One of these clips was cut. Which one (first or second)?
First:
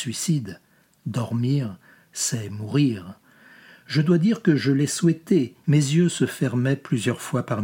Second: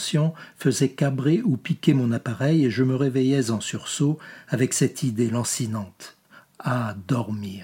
first